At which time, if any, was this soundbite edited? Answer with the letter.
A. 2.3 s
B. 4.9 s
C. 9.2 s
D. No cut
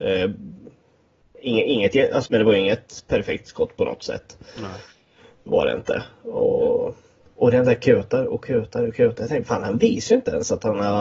A